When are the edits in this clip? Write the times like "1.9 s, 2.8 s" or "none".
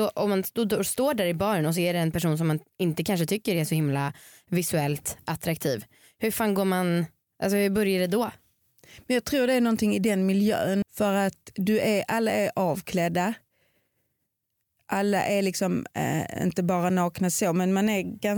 10.8 s